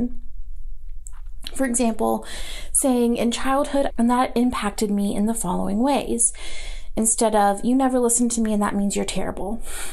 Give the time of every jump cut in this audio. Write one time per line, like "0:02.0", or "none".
0:03.9